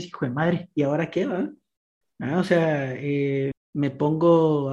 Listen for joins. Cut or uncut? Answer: cut